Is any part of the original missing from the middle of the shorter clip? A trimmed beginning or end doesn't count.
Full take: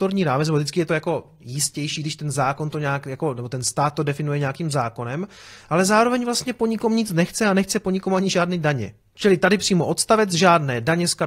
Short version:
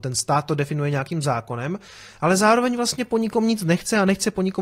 no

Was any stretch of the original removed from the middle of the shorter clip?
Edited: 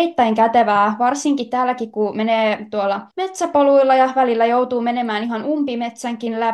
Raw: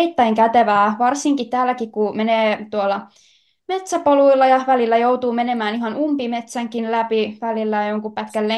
yes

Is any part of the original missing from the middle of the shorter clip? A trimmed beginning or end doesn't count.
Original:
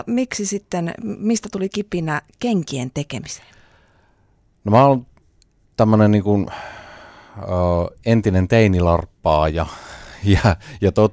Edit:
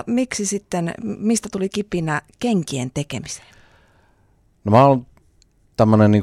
no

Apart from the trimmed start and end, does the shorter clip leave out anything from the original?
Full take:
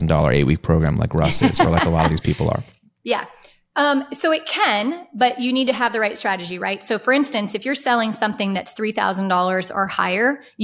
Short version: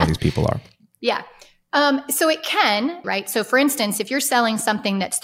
yes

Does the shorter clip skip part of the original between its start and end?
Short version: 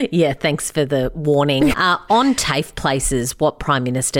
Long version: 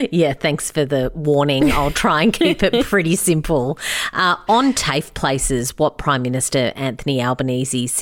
yes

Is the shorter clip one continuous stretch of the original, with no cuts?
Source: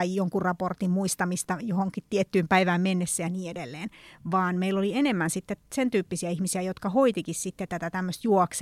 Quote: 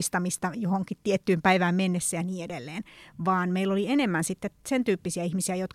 yes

